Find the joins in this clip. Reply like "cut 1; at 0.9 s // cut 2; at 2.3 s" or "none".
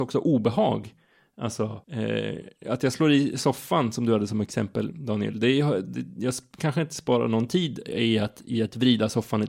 cut 1; at 1.8 s